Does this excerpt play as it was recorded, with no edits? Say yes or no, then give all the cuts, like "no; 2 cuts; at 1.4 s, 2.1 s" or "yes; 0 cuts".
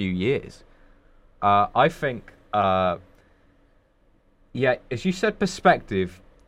no; 1 cut; at 1.4 s